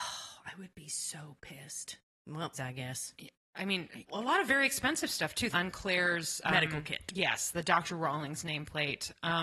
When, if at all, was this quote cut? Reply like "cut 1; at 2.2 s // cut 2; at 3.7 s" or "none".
cut 1; at 2.5 s // cut 2; at 4.1 s // cut 3; at 5.5 s

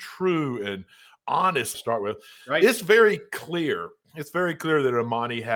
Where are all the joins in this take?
cut 1; at 1.7 s

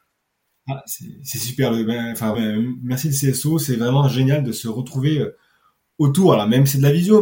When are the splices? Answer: cut 1; at 2.3 s

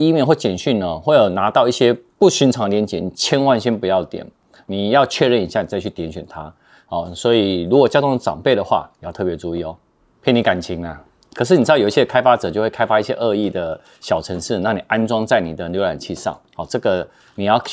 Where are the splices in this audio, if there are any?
cut 1; at 10.0 s // cut 2; at 11.3 s

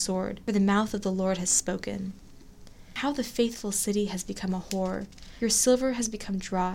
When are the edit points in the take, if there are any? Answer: cut 1; at 5.4 s

